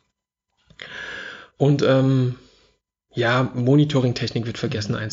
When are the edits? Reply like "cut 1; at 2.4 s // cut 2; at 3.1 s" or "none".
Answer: none